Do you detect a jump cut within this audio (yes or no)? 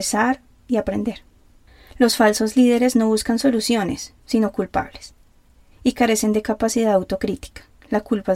no